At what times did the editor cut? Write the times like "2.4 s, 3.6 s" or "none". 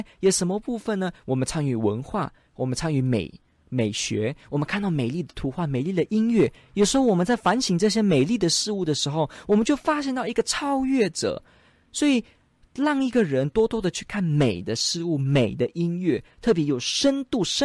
none